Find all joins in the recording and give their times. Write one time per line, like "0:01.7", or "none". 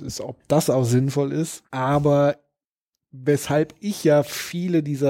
0:01.7